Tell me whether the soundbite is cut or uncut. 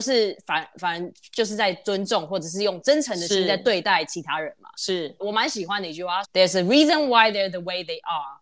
cut